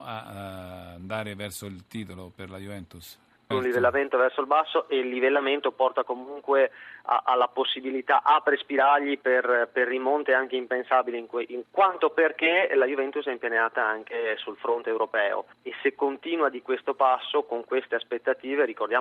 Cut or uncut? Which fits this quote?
cut